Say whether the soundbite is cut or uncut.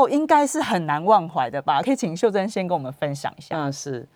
uncut